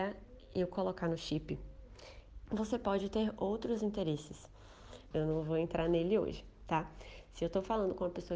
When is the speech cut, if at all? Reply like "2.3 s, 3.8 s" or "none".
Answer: 2.5 s, 5.1 s